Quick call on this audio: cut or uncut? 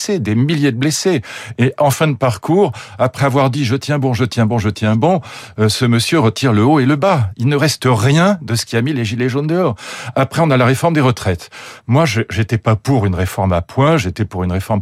uncut